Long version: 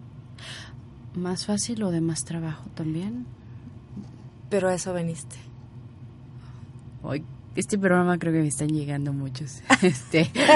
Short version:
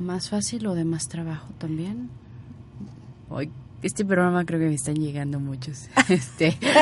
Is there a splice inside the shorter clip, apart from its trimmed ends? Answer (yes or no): yes